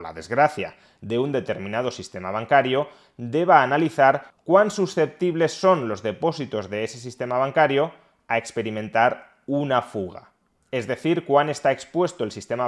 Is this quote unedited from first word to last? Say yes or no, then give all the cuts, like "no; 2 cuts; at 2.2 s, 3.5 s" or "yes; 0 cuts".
yes; 0 cuts